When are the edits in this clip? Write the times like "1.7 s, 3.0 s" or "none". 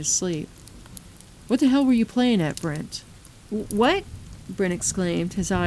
none